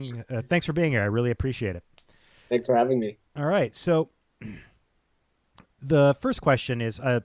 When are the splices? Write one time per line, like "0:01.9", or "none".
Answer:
none